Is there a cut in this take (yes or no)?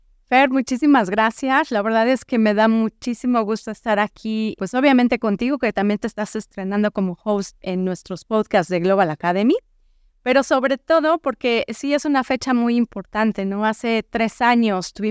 yes